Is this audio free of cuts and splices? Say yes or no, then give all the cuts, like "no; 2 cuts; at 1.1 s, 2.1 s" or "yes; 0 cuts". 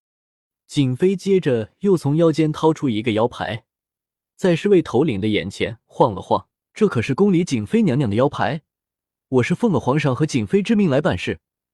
no; 1 cut; at 6.6 s